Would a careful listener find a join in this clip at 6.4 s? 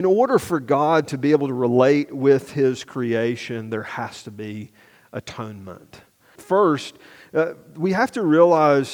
yes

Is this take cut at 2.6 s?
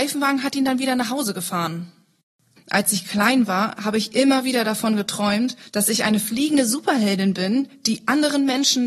yes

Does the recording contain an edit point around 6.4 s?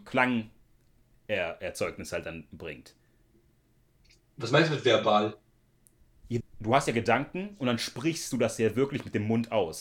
yes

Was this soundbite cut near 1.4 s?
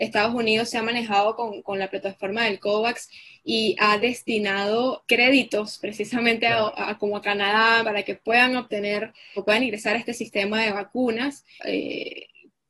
no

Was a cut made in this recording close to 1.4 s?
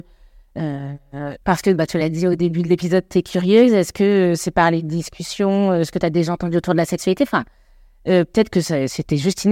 yes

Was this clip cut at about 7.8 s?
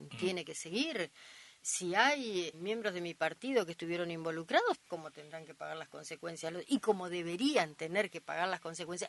no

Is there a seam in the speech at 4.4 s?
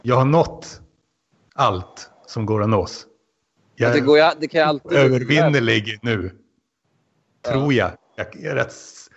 no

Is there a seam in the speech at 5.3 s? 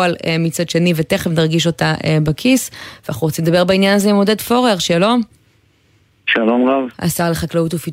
no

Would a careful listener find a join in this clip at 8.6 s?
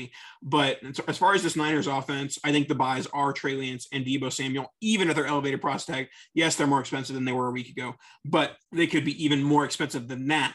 yes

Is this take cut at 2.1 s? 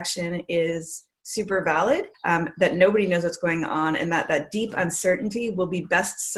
yes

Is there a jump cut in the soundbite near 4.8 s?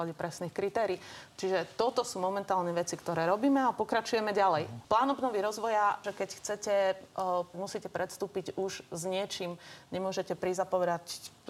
yes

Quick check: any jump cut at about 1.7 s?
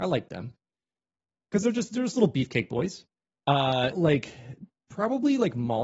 no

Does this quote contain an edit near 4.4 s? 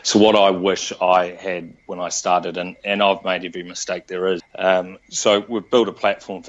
yes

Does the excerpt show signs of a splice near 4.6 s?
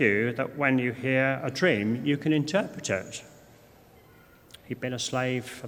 yes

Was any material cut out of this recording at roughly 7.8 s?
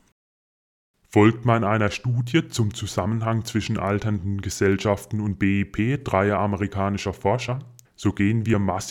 yes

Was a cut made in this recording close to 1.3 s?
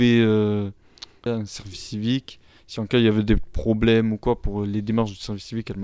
yes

